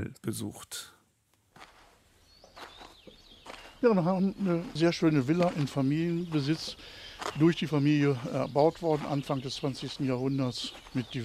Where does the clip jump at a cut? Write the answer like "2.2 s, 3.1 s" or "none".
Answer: none